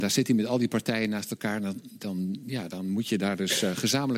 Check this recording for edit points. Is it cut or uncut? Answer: uncut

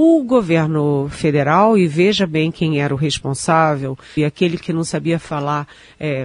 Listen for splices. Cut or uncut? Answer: cut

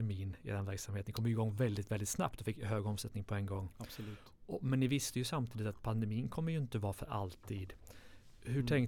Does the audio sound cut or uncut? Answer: uncut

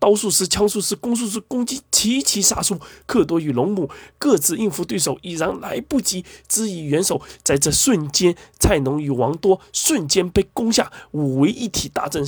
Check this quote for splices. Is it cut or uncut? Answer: uncut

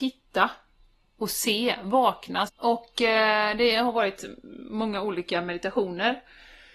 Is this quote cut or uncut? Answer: cut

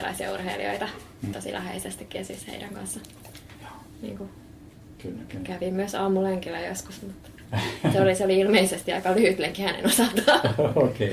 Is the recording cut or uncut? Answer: cut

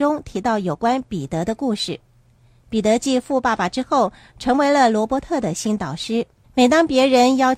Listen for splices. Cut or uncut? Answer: cut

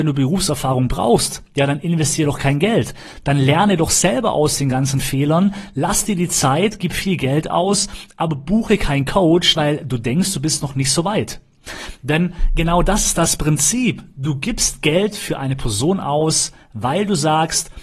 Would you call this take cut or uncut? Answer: cut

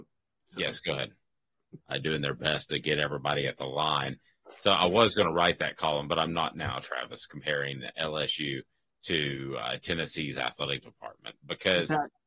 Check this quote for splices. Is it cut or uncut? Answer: cut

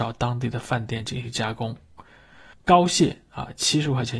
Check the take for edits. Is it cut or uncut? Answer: cut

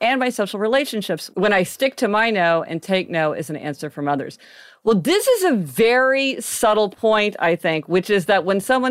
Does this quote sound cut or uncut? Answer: uncut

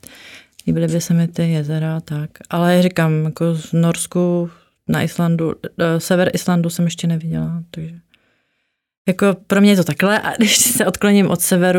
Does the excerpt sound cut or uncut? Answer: uncut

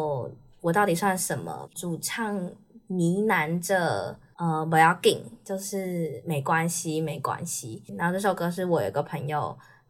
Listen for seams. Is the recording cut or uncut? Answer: cut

